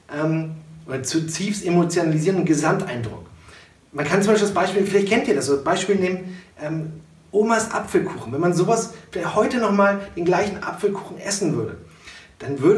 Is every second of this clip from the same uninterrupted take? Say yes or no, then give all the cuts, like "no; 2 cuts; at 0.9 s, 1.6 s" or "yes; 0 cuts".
yes; 0 cuts